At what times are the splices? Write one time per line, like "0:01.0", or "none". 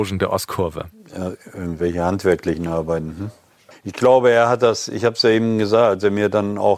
0:03.7